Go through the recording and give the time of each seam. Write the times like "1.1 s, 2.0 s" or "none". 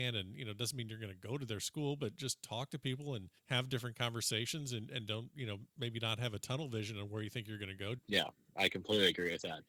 3.4 s, 8.0 s

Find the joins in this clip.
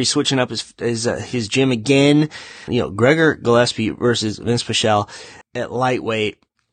2.7 s, 5.4 s

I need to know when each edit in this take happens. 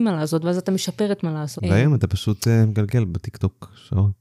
1.6 s

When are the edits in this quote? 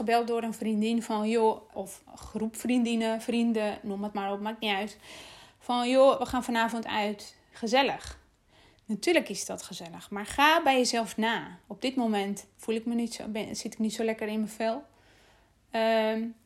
1.7 s, 7.5 s

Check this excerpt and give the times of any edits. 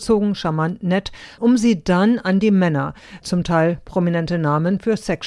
1.4 s, 3.2 s

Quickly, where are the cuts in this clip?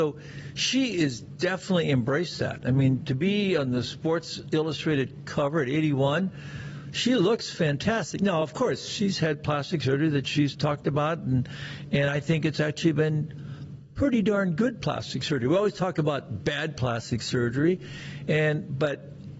none

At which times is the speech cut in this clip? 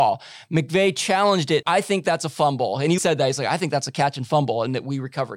1.6 s, 3.0 s

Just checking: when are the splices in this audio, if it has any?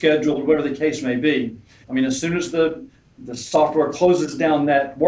1.8 s

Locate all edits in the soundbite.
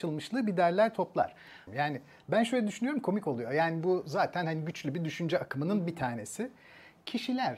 1.7 s

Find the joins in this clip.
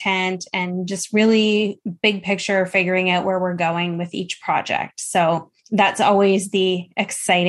5.6 s

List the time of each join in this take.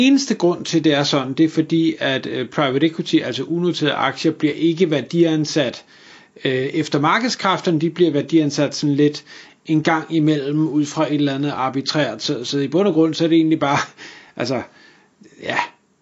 none

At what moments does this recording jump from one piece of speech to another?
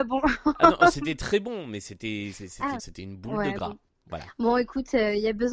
2.8 s

